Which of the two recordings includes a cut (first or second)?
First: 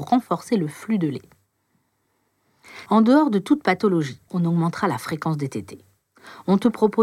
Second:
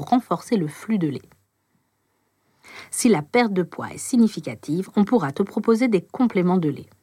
first